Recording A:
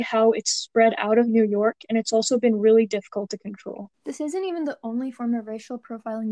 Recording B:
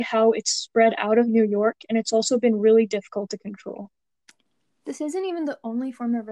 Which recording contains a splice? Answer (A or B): A